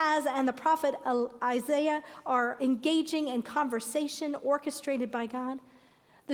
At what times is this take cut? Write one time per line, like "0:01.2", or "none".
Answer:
0:02.6